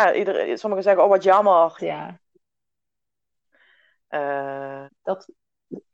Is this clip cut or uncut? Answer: cut